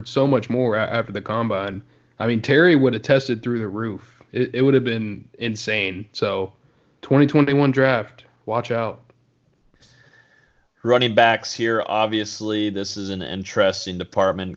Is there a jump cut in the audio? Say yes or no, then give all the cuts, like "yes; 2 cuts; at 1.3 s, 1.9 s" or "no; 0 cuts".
no; 0 cuts